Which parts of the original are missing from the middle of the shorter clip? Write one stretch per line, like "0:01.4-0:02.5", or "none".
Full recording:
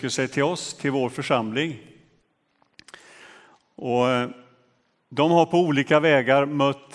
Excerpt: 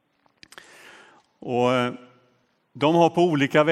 none

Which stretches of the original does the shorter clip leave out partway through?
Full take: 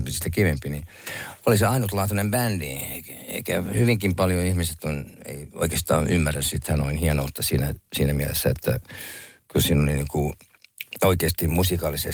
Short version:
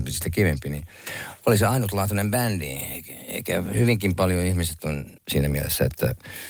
0:05.2-0:07.8

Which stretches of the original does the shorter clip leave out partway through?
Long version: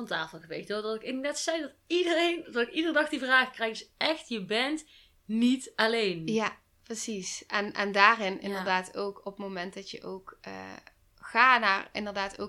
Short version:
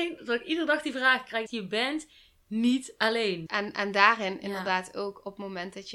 0:03.7-0:04.2
0:06.2-0:07.5

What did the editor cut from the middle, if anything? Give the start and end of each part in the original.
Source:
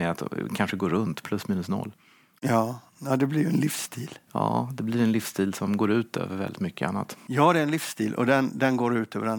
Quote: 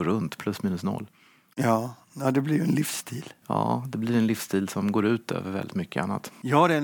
none

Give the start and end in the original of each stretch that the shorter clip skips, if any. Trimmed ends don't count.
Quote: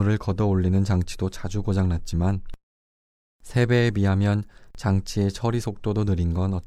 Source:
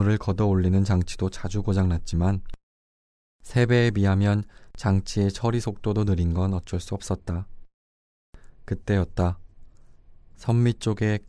none

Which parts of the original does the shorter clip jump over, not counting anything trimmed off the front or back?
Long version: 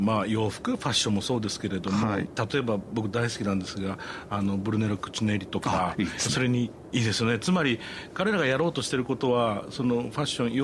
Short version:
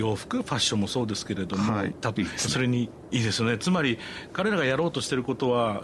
0:02.5-0:06.0

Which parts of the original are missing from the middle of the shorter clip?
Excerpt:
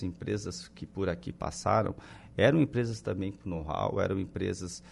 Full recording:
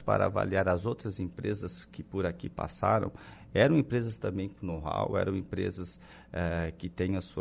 none

